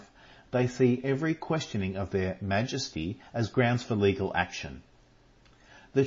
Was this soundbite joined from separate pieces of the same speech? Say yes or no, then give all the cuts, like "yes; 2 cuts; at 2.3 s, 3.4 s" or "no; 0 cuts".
no; 0 cuts